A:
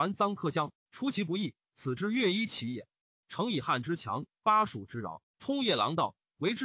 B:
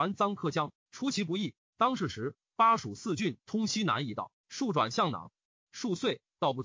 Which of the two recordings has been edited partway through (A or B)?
B